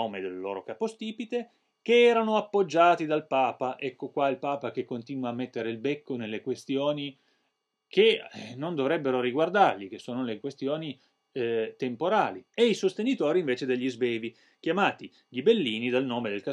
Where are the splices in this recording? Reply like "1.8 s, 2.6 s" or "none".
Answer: 12.5 s